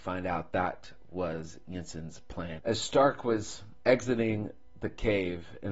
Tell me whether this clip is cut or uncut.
cut